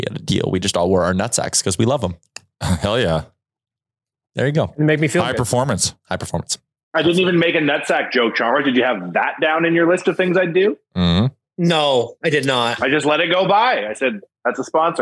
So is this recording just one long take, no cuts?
yes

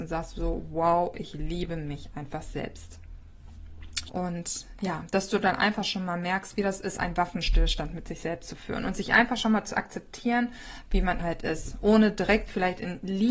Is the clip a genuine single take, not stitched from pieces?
no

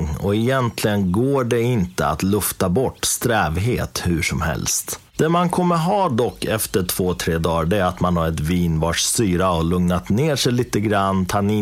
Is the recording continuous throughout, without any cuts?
yes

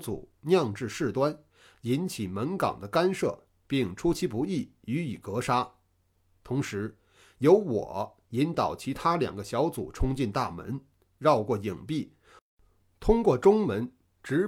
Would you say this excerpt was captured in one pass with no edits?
yes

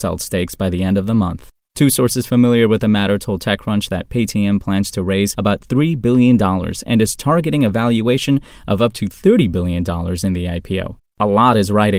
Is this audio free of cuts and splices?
no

